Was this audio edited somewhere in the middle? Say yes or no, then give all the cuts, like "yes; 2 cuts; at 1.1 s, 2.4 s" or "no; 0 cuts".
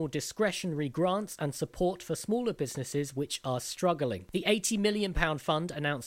no; 0 cuts